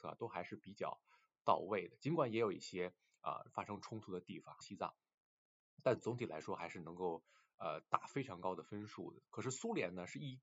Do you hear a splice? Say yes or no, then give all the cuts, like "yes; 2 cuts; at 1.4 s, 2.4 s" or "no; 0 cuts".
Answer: yes; 1 cut; at 4.6 s